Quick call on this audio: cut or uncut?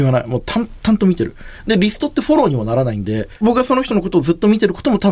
uncut